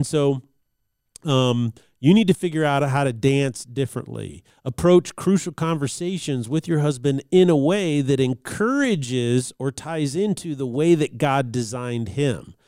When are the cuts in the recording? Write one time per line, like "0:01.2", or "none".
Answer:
none